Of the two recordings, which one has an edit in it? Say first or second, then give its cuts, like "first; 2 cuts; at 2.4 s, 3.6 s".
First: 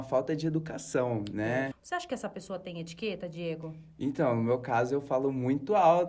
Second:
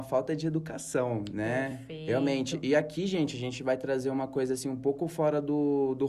first; 1 cut; at 1.7 s